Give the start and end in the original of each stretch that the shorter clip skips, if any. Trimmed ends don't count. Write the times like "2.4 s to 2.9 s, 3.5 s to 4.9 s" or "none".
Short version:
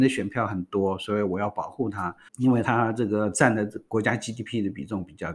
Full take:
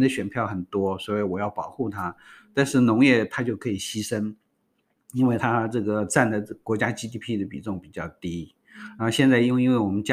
2.3 s to 5.0 s